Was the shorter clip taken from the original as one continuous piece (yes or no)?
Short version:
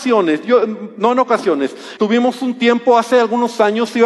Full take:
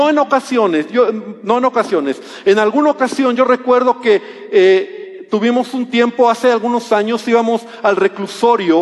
no